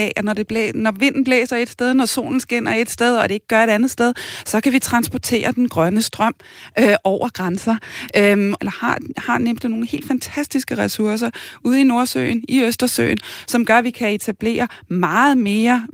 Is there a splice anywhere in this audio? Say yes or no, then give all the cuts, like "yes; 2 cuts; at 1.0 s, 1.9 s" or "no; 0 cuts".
yes; 1 cut; at 8.6 s